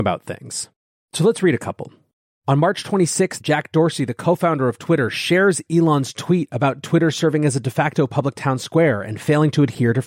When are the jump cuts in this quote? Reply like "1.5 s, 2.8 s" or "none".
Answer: 3.4 s